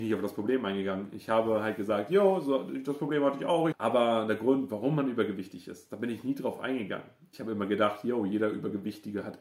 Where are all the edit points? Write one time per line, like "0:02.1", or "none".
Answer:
0:03.7
0:07.3